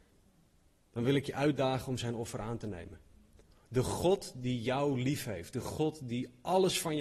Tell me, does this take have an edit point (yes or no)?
no